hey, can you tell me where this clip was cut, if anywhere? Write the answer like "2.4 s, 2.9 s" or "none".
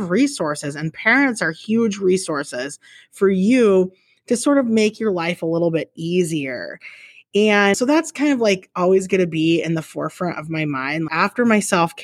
7.7 s, 11.1 s